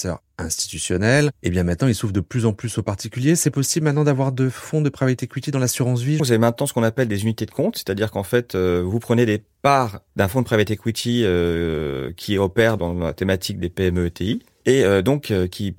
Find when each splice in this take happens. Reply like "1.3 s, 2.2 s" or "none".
6.2 s